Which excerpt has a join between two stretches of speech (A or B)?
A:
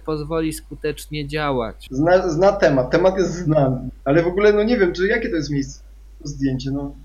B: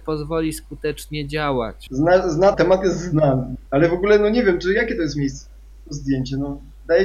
B